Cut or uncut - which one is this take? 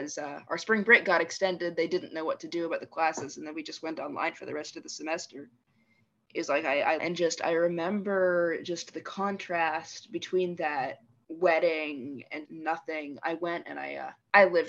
cut